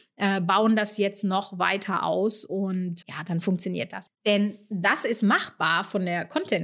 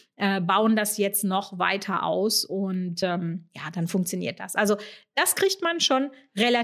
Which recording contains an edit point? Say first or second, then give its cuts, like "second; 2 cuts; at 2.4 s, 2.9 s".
first; 2 cuts; at 3.0 s, 4.1 s